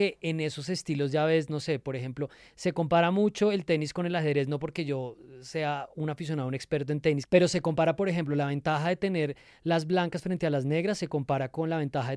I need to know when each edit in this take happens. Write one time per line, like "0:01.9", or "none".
none